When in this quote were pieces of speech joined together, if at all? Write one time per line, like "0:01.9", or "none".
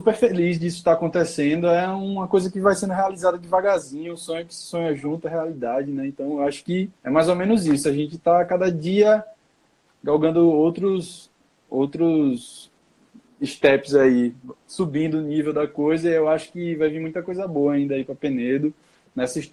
0:07.0